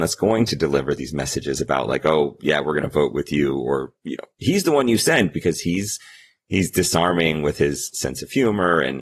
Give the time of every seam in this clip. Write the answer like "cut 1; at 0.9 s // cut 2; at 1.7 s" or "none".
none